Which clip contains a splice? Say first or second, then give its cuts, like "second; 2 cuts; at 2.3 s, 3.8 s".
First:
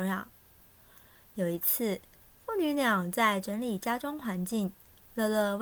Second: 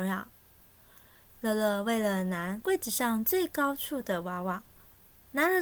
second; 1 cut; at 1.3 s